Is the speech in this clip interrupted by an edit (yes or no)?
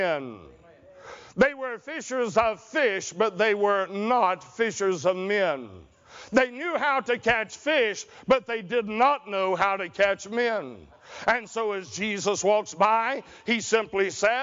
no